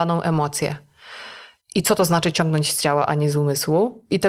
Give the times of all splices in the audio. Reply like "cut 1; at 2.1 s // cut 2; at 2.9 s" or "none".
cut 1; at 1.6 s